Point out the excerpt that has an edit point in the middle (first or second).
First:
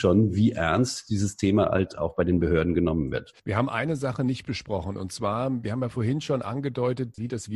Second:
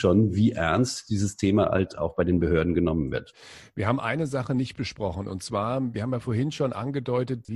first